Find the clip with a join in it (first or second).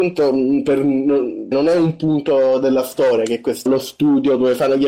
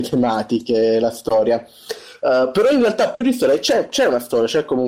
first